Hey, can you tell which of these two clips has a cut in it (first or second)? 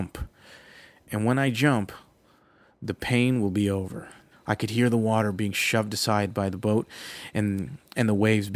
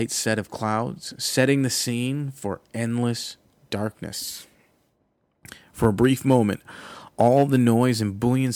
first